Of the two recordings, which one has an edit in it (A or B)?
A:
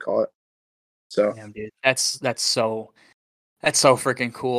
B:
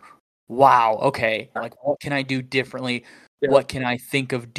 B